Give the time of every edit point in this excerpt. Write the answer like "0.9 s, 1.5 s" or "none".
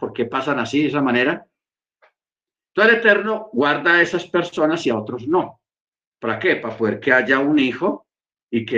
6.1 s